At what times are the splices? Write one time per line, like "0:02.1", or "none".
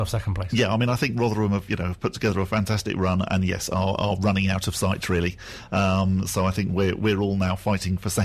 none